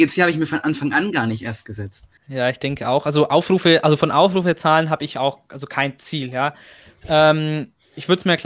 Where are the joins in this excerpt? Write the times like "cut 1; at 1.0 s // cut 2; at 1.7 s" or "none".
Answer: cut 1; at 2.2 s